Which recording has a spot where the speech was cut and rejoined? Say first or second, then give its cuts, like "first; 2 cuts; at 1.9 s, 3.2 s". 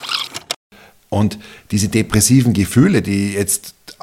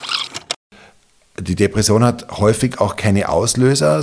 first; 1 cut; at 1.1 s